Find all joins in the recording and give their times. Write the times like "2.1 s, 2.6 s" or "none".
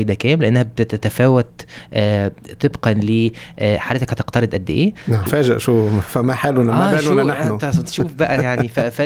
5.3 s